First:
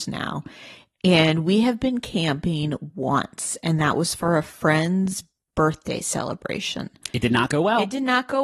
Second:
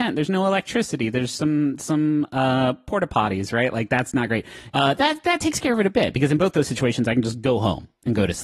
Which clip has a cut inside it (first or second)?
second